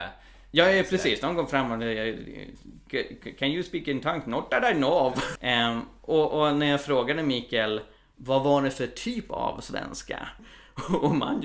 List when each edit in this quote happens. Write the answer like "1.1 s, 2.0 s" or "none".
5.4 s, 10.4 s